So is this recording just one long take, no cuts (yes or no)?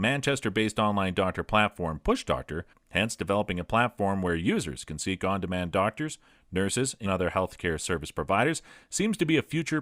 no